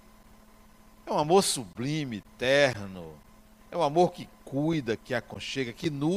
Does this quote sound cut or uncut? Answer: cut